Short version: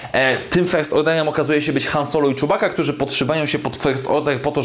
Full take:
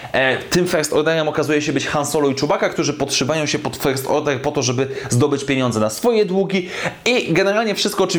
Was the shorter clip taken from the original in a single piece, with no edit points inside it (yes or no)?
yes